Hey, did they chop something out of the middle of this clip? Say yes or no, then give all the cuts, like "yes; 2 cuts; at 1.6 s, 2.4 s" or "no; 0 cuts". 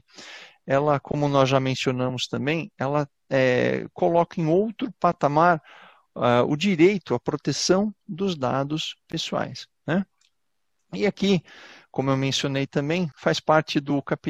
no; 0 cuts